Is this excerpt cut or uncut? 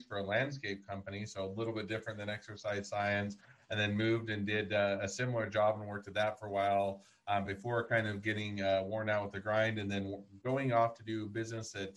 uncut